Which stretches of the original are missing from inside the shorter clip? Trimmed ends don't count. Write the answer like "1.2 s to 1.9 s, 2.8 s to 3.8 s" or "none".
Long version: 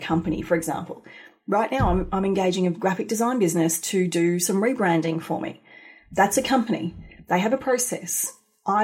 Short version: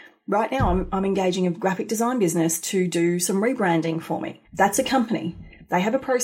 5.6 s to 6.0 s